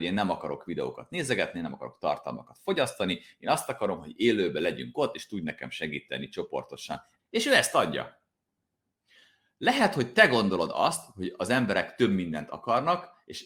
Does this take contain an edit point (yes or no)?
yes